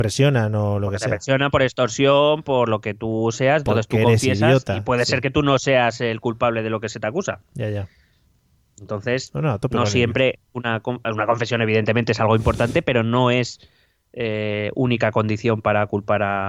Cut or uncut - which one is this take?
uncut